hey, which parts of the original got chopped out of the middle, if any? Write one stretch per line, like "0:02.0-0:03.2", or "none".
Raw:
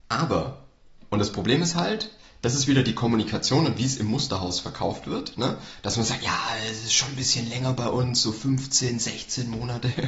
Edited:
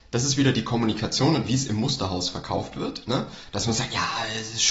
none